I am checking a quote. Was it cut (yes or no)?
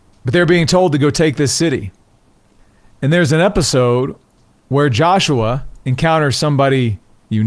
yes